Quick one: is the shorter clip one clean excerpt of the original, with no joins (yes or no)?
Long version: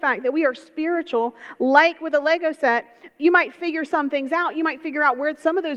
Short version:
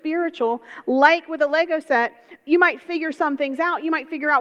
yes